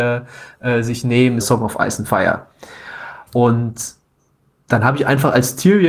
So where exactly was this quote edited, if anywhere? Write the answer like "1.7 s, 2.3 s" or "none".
1.4 s, 3.3 s